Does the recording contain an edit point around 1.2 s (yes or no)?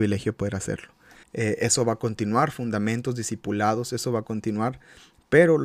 yes